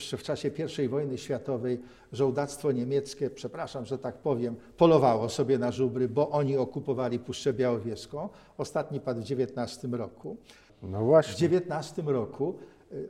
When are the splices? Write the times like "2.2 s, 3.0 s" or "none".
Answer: 10.7 s